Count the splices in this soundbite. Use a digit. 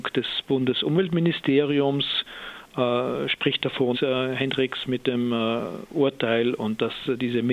1